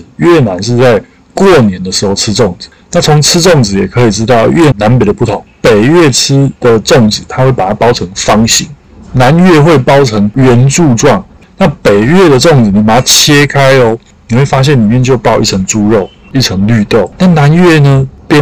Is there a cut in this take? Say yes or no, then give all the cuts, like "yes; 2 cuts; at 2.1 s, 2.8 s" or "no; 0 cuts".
yes; 1 cut; at 4.7 s